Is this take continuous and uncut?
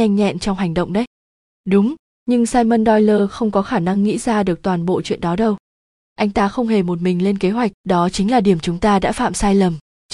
no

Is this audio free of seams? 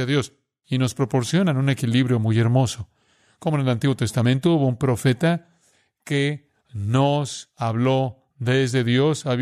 yes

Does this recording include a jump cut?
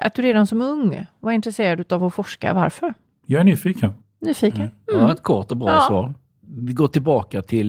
no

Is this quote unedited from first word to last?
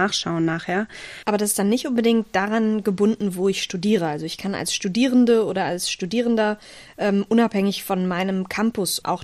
no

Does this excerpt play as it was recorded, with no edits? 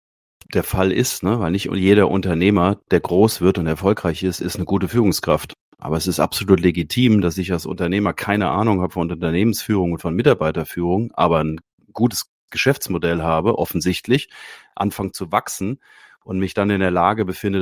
yes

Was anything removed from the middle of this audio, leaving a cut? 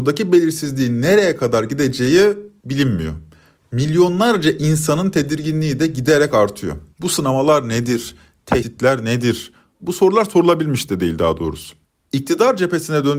yes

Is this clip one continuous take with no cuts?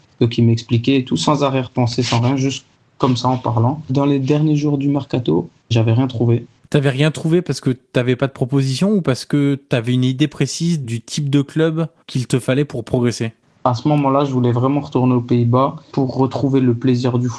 yes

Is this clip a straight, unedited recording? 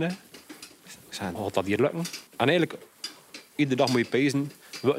no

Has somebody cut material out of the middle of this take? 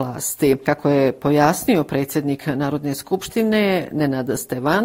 no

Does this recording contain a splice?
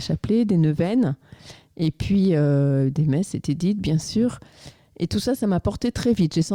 no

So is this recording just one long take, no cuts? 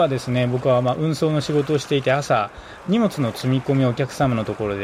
yes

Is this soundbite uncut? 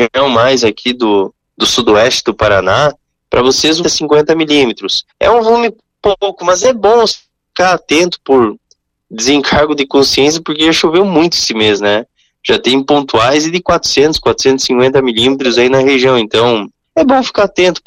no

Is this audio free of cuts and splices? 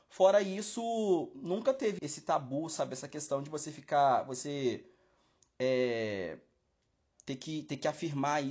no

